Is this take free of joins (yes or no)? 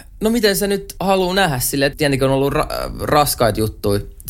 no